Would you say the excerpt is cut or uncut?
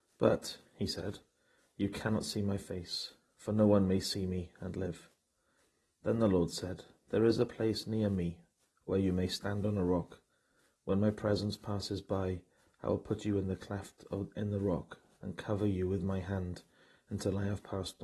uncut